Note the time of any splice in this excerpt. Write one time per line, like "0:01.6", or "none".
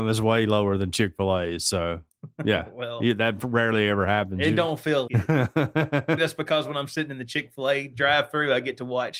0:05.1
0:06.2